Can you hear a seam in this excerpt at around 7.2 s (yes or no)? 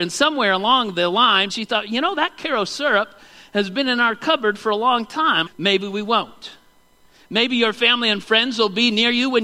no